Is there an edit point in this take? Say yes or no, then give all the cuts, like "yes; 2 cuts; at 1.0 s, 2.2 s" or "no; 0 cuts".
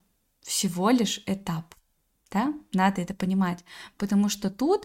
no; 0 cuts